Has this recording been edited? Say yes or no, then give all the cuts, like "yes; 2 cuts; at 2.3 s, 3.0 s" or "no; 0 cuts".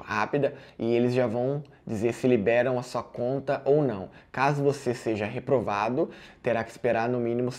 no; 0 cuts